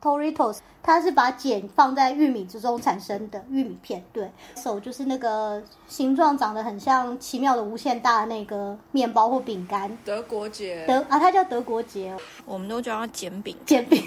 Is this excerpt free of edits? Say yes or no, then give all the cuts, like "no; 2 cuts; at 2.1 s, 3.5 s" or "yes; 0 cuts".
no; 2 cuts; at 4.6 s, 12.4 s